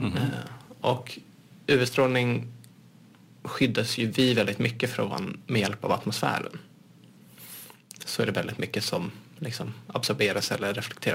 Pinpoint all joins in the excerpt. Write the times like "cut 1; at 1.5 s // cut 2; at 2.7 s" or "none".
none